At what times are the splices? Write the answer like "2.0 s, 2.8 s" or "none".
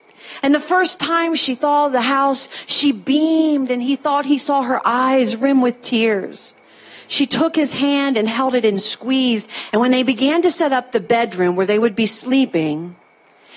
9.7 s